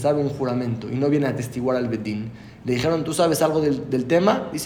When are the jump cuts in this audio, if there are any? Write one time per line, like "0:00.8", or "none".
none